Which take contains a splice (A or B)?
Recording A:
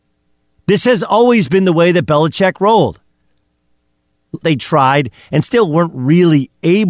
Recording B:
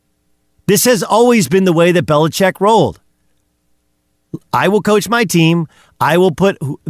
A